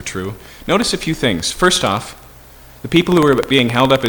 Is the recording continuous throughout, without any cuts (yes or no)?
yes